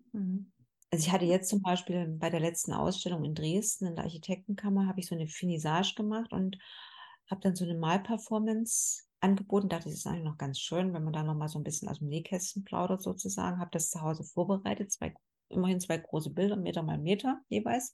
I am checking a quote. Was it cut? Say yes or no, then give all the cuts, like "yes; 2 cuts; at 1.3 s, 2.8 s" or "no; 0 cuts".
no; 0 cuts